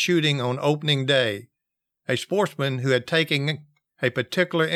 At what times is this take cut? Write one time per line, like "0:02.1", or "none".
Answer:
none